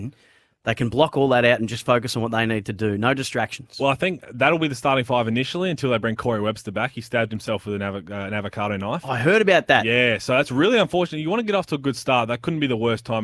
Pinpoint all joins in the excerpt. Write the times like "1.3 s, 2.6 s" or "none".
none